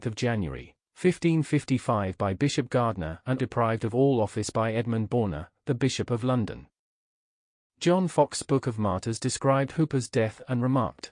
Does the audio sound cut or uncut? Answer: cut